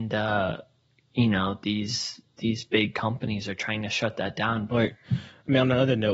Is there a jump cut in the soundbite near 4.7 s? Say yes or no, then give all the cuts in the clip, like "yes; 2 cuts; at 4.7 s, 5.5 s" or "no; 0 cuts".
yes; 1 cut; at 4.7 s